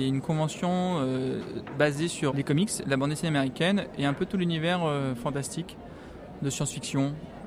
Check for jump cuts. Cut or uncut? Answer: cut